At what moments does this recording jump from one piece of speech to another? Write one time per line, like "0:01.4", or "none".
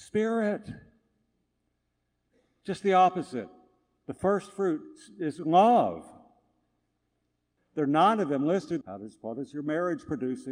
0:07.6
0:08.8